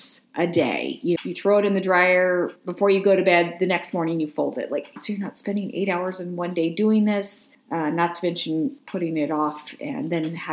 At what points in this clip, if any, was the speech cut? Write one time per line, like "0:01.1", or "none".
0:01.2
0:05.0